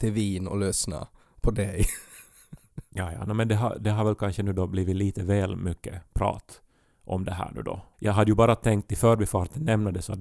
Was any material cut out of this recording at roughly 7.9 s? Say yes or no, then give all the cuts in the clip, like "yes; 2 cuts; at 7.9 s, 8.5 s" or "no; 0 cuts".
yes; 1 cut; at 7.9 s